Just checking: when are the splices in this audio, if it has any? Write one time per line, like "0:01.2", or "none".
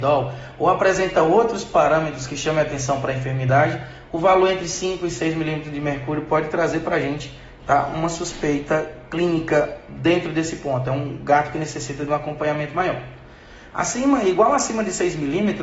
none